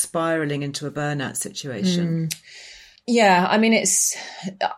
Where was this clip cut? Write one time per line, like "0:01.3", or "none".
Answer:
none